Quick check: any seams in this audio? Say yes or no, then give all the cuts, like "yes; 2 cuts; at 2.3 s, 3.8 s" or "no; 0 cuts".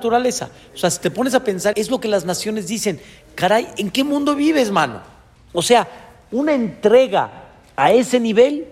yes; 2 cuts; at 1.7 s, 5.4 s